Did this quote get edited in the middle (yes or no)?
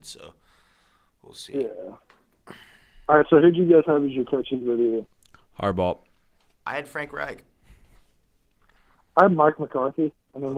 no